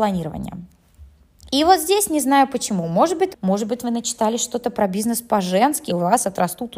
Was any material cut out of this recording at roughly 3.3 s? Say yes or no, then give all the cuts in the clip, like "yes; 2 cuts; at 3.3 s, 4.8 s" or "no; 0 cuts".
yes; 2 cuts; at 3.3 s, 5.9 s